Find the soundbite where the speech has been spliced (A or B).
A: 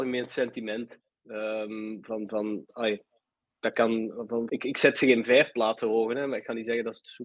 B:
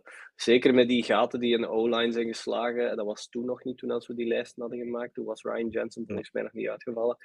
A